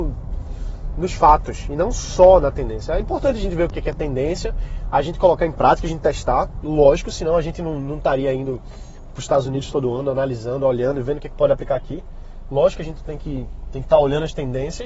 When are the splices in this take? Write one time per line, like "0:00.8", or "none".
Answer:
none

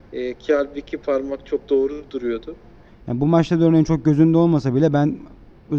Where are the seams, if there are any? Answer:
0:02.9

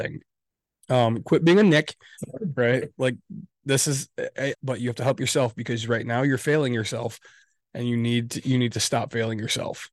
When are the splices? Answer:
0:04.5

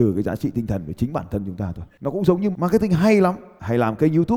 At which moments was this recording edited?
0:02.5

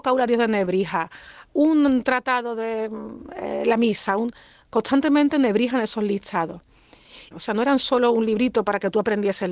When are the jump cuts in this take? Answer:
0:07.3

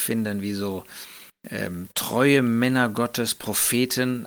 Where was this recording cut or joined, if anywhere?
none

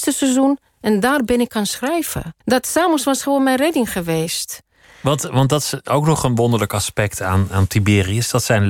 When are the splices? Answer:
0:02.4

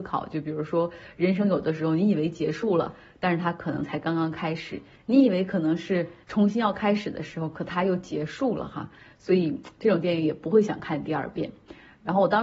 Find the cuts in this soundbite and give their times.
0:06.2

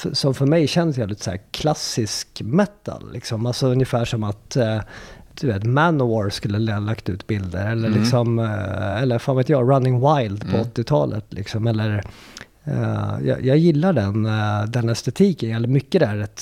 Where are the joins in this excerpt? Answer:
none

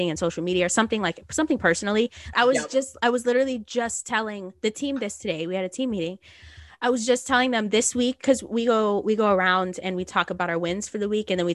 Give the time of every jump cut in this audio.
0:02.3

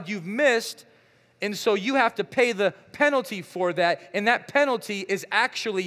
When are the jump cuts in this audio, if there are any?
none

